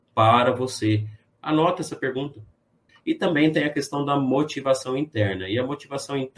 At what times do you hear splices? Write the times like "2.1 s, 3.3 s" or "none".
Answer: 1.4 s, 2.9 s